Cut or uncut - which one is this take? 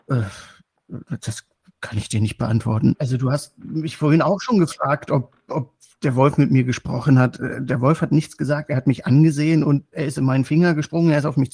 cut